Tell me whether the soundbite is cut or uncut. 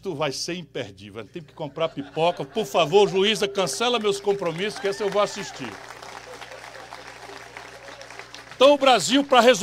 uncut